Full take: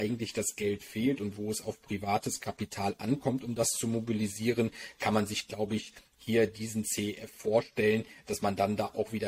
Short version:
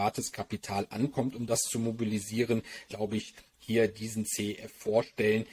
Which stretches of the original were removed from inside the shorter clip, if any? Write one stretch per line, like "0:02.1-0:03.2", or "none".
0:05.0-0:05.5